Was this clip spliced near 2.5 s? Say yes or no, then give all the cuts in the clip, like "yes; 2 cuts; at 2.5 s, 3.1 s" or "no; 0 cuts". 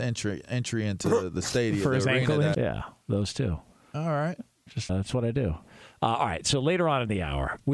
yes; 2 cuts; at 2.5 s, 4.9 s